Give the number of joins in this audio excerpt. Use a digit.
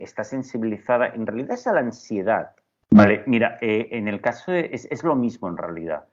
1